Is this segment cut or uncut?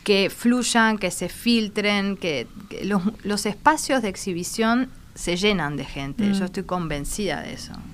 cut